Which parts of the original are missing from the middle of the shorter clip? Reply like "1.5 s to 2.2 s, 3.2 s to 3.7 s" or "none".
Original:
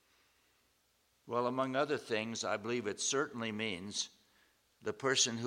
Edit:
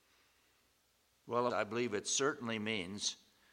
1.5 s to 2.4 s